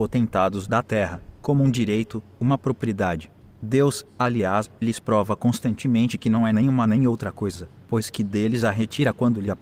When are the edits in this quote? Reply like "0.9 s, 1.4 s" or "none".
none